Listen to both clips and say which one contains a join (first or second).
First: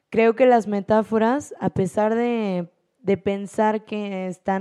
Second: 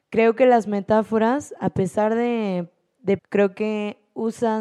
second